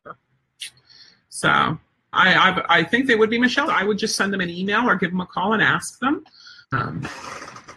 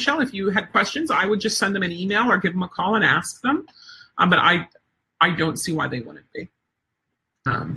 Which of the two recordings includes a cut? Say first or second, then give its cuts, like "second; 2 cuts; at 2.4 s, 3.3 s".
first; 3 cuts; at 2.1 s, 3.7 s, 6.6 s